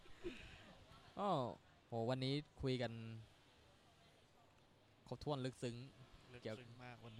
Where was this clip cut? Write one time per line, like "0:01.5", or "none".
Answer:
none